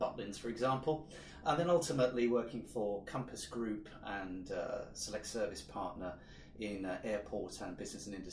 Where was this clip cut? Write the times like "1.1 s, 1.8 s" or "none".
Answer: none

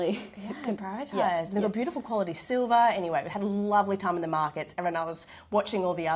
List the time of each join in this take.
none

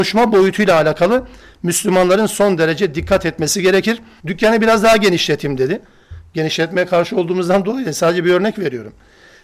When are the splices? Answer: 4.2 s

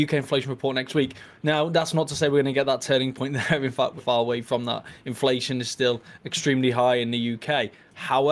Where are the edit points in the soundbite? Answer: 4.0 s

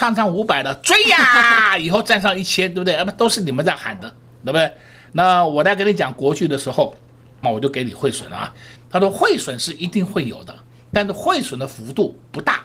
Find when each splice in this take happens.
7.4 s, 8.8 s

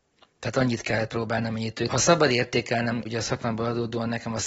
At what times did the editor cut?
1.9 s, 3.0 s

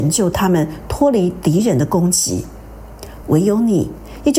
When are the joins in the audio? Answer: 3.2 s

